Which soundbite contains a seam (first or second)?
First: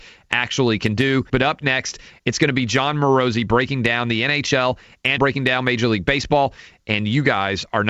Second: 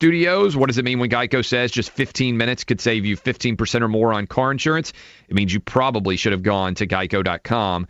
first